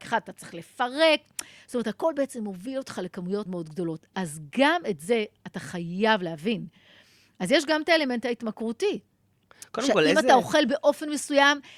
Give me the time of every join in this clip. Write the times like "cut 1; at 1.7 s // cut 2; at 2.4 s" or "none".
cut 1; at 3.5 s